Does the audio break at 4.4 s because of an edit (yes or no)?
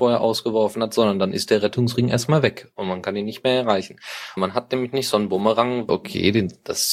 yes